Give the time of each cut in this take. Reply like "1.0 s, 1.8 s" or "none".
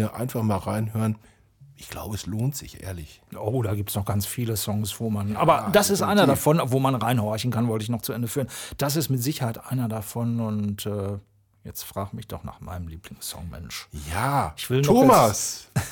none